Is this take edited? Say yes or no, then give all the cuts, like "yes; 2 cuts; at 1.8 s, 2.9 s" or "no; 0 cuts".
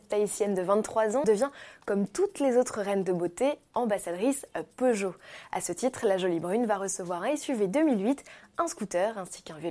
yes; 1 cut; at 1.2 s